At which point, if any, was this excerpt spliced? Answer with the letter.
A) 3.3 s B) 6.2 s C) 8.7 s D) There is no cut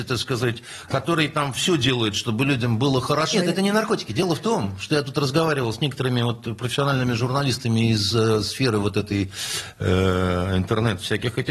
A